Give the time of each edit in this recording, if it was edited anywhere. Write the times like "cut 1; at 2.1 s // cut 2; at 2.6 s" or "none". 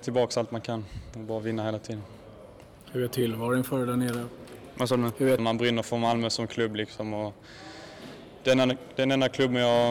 cut 1; at 5.4 s